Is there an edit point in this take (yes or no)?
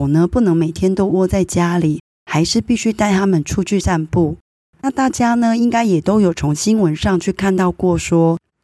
yes